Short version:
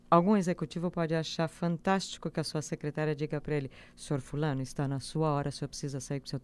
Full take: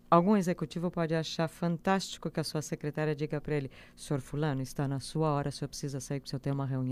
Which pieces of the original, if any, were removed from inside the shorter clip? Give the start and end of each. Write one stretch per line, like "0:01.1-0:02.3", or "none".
none